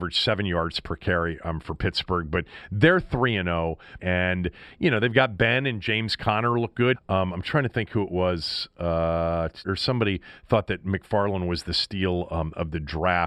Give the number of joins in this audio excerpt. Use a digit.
3